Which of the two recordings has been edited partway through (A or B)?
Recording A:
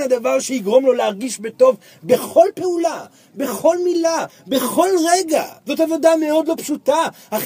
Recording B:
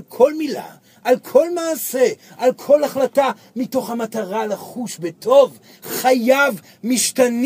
A